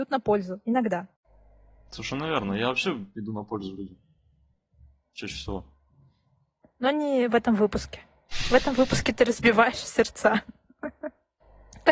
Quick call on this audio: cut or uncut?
uncut